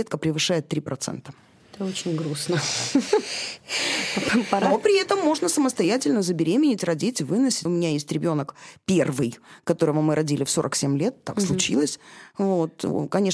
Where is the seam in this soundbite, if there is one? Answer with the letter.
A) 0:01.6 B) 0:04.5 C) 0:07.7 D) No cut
C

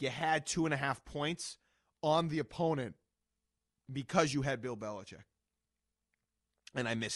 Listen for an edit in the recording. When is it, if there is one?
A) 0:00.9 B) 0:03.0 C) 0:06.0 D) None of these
D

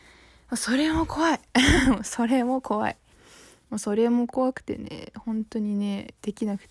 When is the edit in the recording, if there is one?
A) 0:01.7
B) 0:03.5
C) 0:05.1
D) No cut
D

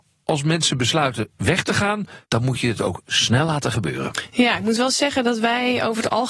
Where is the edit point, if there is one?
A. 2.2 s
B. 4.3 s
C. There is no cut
A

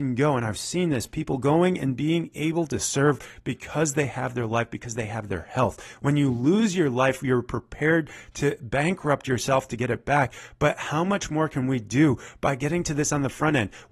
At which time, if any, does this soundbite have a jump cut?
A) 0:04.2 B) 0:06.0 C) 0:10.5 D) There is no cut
D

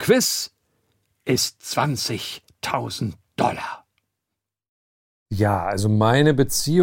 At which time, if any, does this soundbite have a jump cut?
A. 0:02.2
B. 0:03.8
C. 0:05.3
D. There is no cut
C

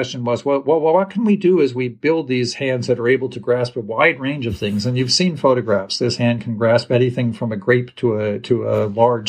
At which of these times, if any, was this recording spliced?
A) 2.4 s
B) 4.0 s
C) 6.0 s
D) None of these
D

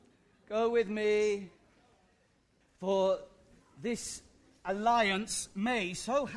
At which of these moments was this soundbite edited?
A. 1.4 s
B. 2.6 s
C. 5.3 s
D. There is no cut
B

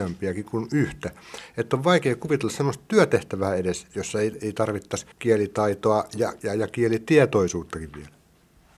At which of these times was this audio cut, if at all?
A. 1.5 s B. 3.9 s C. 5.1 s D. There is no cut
C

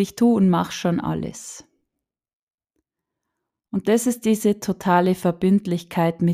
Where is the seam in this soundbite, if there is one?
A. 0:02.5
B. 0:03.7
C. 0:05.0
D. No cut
D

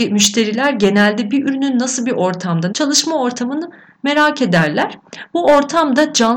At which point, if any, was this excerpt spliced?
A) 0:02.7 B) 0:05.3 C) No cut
A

